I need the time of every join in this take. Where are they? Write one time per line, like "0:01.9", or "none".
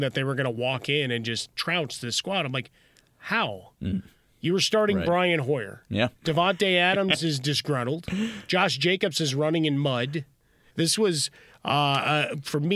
0:06.2
0:10.7